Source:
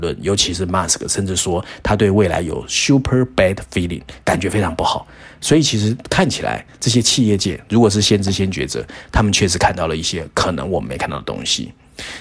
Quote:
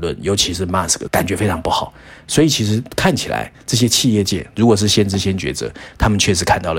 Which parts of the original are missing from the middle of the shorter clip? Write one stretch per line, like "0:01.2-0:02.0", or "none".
0:01.1-0:04.2